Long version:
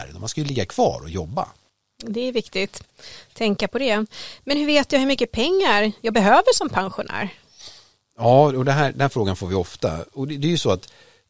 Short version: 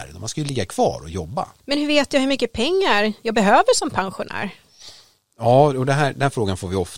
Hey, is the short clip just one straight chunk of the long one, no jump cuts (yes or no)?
no